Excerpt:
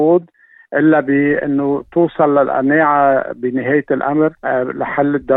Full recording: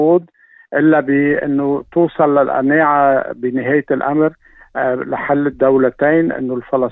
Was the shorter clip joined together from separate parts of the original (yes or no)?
yes